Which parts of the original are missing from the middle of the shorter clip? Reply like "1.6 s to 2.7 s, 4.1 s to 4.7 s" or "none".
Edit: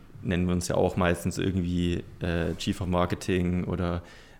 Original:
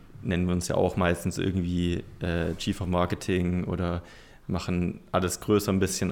none